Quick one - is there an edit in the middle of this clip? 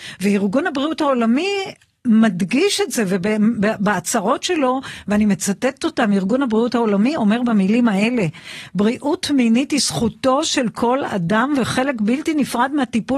no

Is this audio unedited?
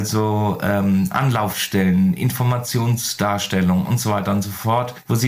yes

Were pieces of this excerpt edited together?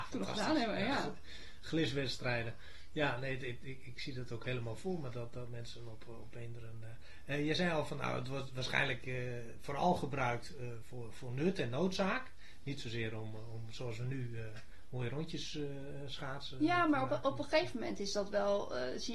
no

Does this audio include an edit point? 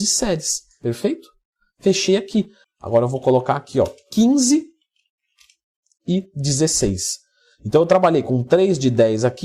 yes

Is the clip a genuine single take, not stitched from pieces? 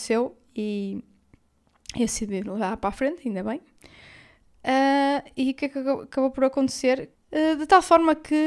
no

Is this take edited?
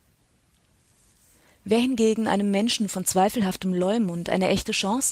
no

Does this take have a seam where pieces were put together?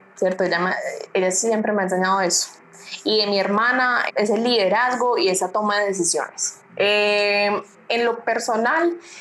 yes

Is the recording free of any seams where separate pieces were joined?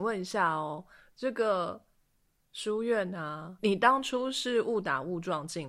no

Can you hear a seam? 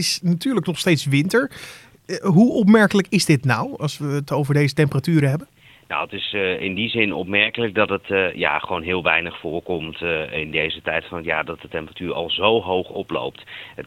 no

